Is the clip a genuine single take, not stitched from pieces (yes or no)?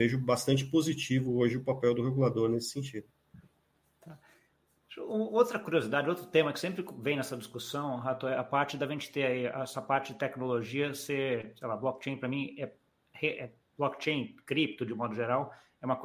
yes